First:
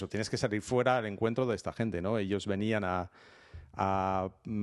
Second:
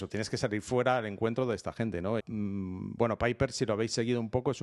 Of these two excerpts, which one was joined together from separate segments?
second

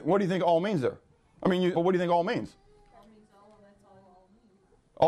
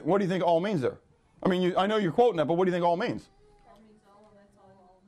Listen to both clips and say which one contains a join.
first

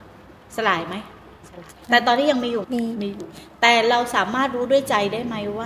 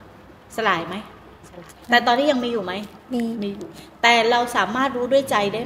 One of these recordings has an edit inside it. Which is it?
first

